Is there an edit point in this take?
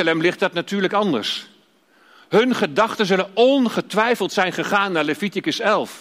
no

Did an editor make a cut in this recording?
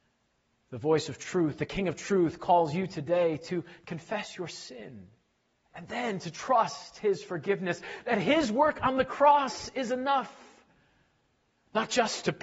no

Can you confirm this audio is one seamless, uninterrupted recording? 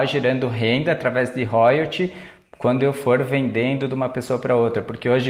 yes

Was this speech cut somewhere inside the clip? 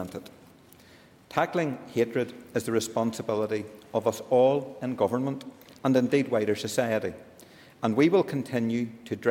no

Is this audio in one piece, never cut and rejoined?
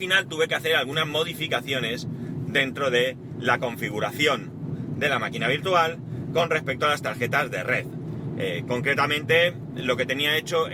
yes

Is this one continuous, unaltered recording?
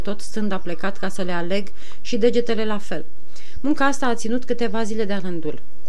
yes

